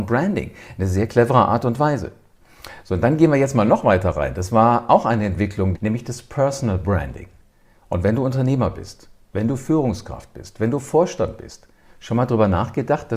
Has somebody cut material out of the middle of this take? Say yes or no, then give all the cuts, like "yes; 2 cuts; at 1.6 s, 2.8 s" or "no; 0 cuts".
yes; 1 cut; at 5.7 s